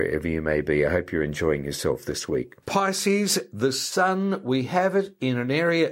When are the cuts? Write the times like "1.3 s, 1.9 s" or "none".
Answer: 2.6 s